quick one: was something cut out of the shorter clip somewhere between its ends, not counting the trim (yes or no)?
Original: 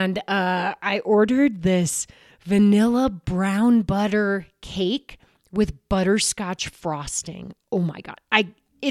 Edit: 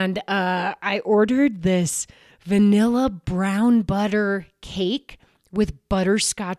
no